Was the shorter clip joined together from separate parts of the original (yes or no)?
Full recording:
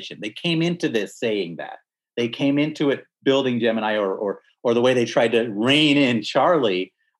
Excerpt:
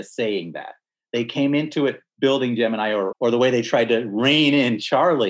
yes